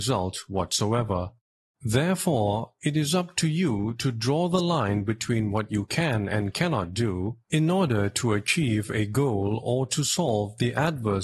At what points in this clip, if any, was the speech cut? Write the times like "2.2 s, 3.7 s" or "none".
none